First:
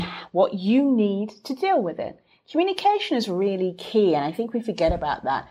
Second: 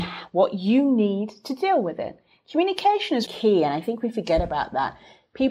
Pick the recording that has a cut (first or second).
second